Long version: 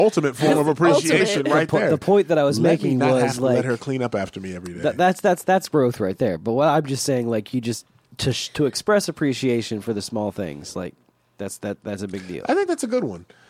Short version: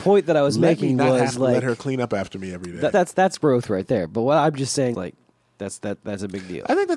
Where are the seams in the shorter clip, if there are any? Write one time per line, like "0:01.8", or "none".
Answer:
0:02.9
0:04.9